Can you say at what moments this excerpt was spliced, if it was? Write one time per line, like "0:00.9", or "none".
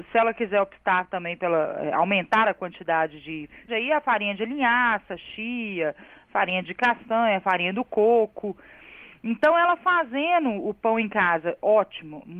0:03.7